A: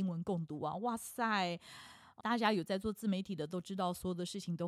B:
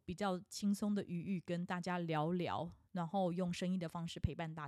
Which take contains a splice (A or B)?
A